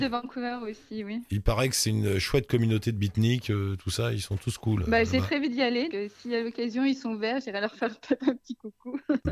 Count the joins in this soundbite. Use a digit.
1